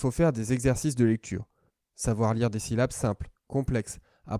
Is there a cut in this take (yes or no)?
no